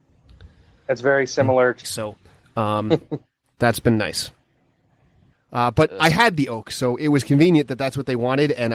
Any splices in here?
yes; 2 cuts; at 1.8 s, 5.3 s

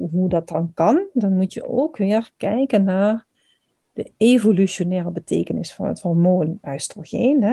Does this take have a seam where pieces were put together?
no; 0 cuts

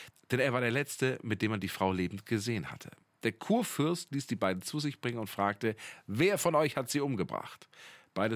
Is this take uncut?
yes; 0 cuts

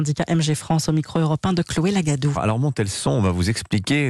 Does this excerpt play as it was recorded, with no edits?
no; 1 cut; at 2.3 s

